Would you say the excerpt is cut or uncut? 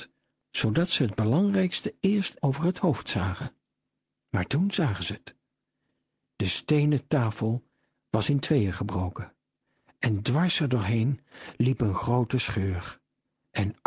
cut